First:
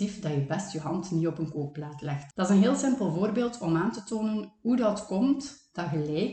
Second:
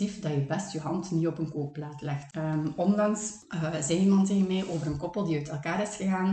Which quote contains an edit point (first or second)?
second